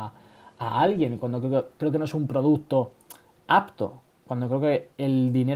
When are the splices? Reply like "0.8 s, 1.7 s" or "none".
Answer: none